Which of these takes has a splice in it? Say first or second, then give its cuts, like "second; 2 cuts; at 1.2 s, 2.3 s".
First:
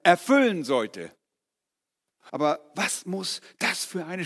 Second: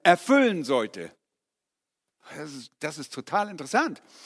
first; 1 cut; at 2.3 s